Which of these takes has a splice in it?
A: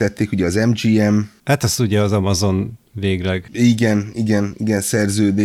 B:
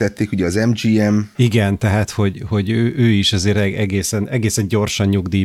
B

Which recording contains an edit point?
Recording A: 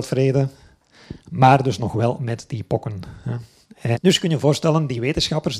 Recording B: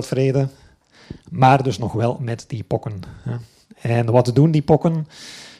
A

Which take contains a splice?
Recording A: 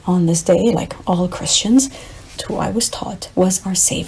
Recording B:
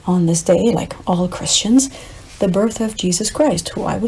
A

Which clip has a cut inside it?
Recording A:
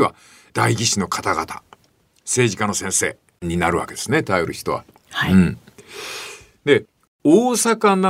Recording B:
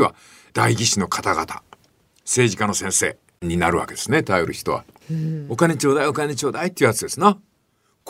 B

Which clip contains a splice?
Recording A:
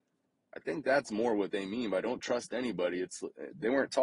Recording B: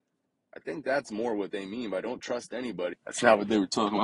B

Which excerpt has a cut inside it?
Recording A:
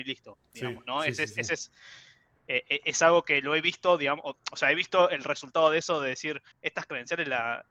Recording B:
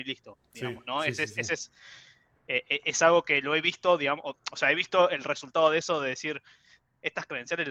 A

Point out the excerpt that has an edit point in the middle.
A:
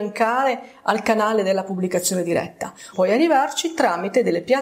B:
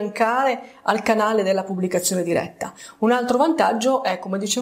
A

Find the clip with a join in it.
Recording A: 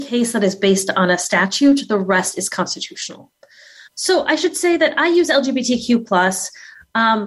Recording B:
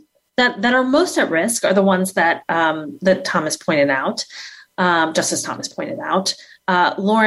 A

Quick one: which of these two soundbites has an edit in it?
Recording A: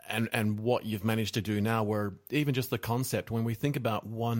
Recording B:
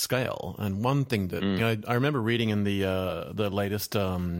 B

